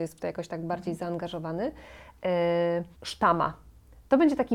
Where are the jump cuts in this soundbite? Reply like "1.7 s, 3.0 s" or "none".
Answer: 2.9 s